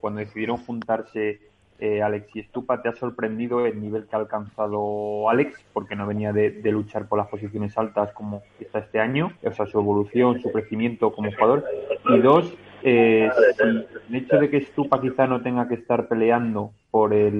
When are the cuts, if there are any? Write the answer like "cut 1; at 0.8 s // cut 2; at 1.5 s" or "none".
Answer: cut 1; at 9.4 s